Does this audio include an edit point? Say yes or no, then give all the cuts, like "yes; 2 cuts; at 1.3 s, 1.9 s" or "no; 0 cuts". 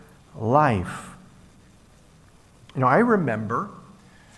no; 0 cuts